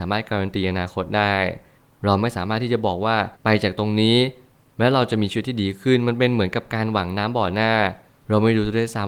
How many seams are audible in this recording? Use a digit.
1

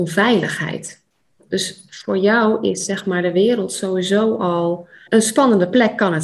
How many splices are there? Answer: 1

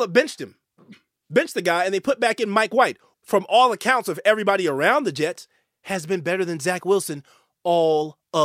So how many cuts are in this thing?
1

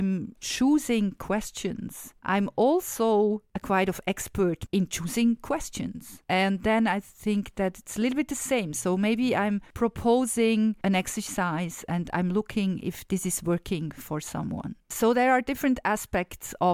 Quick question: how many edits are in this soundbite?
0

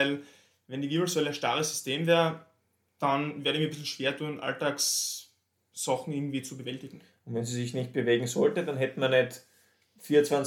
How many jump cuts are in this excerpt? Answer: 0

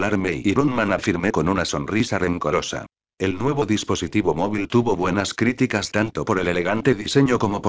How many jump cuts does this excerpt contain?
2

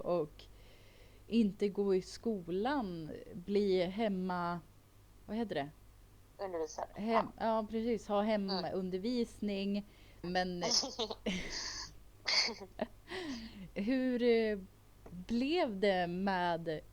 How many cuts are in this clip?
2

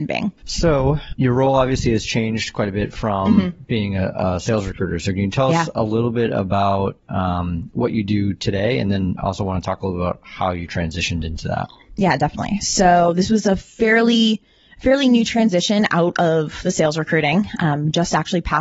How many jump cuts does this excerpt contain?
0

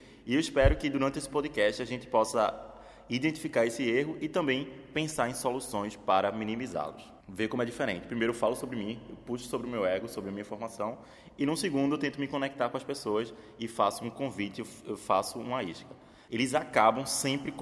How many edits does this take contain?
2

